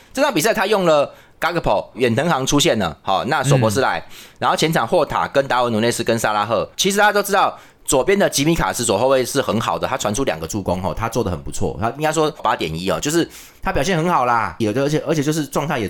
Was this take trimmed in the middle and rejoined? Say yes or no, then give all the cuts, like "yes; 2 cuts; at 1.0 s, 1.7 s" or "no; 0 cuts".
yes; 2 cuts; at 12.4 s, 14.6 s